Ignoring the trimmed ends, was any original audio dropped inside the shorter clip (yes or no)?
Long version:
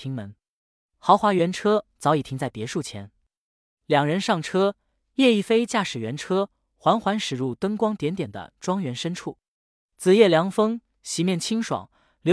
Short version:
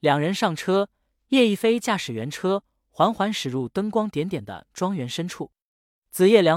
no